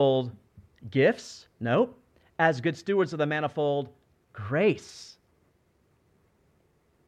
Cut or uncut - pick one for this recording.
uncut